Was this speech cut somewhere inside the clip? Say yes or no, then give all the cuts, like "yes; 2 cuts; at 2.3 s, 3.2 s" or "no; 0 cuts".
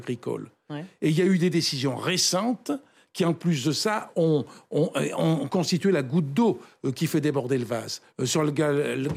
yes; 1 cut; at 8.1 s